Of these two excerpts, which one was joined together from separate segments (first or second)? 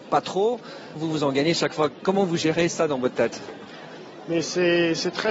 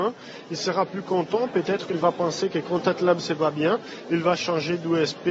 first